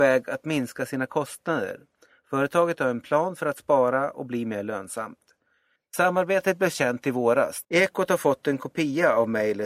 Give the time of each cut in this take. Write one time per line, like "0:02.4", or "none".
0:05.8
0:07.6